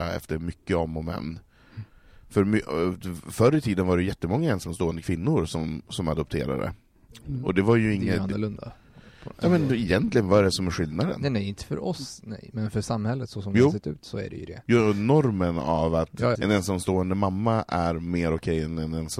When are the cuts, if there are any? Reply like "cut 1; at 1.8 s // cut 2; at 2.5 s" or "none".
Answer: cut 1; at 16.4 s